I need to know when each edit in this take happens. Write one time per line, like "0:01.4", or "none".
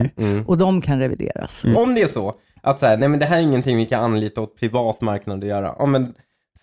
0:01.7